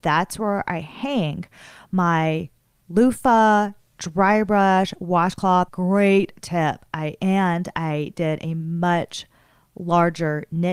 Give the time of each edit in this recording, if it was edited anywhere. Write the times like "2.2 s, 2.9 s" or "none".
5.7 s